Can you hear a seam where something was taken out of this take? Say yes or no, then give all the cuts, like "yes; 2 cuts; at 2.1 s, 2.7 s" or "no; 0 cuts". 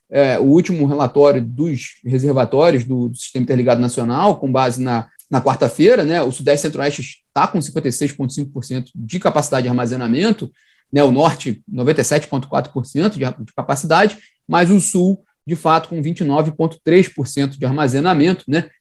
yes; 1 cut; at 5.2 s